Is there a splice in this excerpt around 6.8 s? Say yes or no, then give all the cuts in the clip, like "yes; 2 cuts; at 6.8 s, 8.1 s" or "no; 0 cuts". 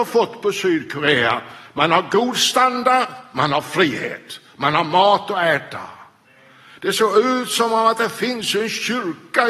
yes; 1 cut; at 6.8 s